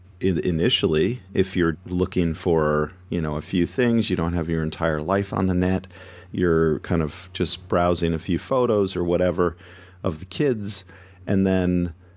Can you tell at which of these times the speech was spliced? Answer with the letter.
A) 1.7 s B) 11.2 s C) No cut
A